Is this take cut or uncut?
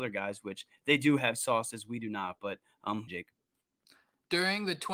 cut